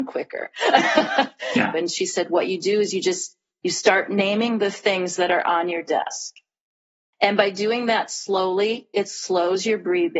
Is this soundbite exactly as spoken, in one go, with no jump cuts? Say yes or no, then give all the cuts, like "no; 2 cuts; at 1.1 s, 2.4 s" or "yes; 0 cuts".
no; 2 cuts; at 1.7 s, 7.1 s